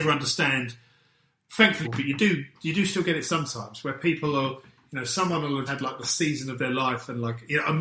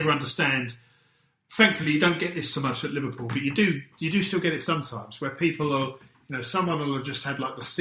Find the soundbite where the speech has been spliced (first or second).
first